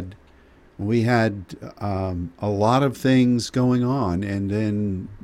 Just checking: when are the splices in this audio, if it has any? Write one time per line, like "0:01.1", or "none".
none